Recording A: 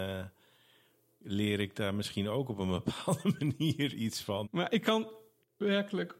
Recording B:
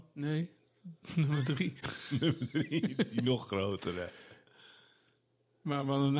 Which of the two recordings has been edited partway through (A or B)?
A